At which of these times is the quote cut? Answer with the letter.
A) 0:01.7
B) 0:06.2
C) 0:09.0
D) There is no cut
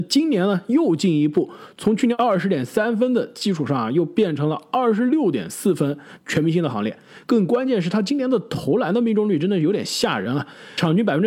B